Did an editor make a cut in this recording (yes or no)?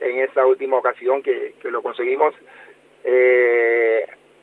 no